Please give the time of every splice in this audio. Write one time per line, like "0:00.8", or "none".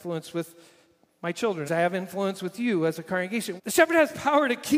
0:01.7
0:03.6